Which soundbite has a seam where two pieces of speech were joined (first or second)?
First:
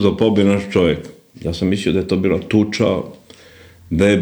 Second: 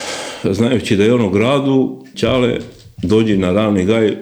second